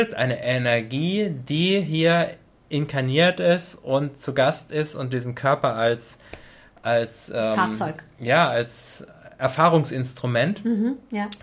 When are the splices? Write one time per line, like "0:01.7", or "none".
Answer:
none